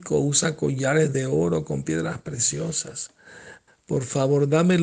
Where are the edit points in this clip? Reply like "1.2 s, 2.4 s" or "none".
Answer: 3.7 s